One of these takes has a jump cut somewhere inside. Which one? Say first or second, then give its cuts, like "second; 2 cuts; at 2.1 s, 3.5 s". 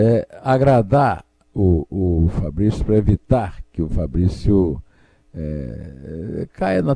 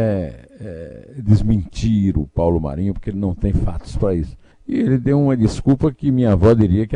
second; 1 cut; at 4.5 s